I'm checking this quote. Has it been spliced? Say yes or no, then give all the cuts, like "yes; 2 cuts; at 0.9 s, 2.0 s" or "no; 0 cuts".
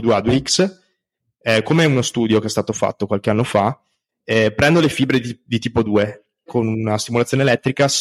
yes; 1 cut; at 6.5 s